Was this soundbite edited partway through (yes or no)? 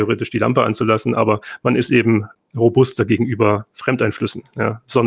no